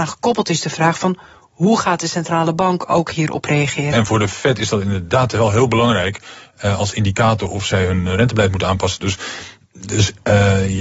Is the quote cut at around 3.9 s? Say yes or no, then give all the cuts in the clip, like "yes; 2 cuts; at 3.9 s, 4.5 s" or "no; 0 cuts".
yes; 1 cut; at 3.9 s